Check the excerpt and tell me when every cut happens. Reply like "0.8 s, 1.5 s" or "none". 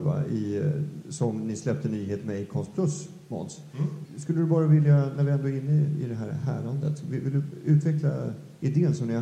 4.0 s